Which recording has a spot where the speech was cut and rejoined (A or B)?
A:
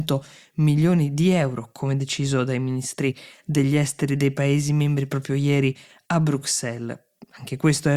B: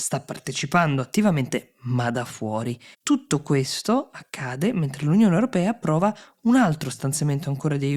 B